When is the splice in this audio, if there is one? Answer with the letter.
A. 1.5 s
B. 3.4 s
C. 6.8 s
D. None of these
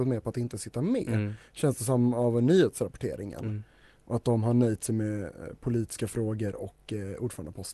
D